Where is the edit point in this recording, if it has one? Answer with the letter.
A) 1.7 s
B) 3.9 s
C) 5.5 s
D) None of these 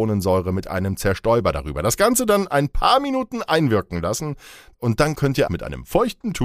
C